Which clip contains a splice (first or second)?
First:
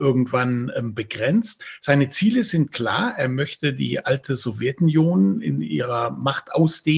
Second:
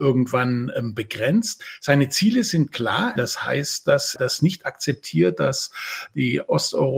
second